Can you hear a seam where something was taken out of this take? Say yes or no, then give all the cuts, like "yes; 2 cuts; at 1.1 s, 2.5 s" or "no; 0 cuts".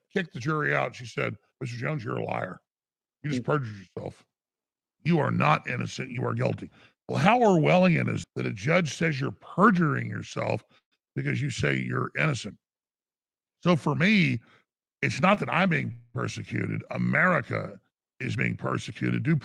yes; 1 cut; at 8.2 s